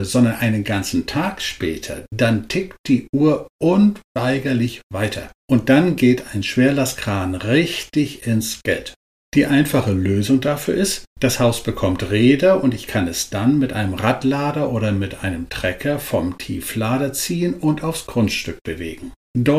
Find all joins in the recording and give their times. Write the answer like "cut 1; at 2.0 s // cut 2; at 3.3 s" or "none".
none